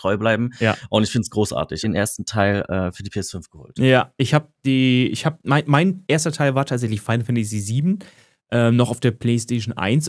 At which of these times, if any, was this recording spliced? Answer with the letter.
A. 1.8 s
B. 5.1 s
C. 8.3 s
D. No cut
A